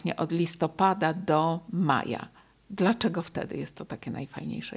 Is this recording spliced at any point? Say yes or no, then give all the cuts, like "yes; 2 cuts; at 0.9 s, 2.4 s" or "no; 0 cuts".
no; 0 cuts